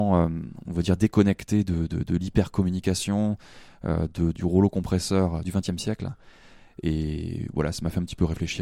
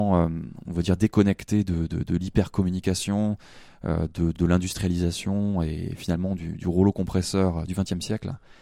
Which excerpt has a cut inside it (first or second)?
first